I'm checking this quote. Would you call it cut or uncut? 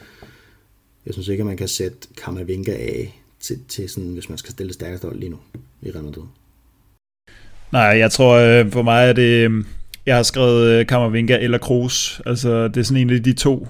uncut